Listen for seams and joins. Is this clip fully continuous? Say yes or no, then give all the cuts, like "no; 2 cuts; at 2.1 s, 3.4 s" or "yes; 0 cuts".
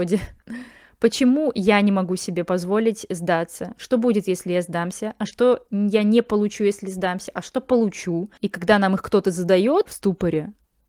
no; 2 cuts; at 8.4 s, 9.9 s